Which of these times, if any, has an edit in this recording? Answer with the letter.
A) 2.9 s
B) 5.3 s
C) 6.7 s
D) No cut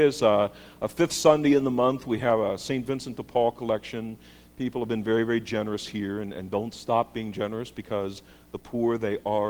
D